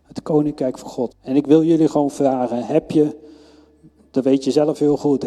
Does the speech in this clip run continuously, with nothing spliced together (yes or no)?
no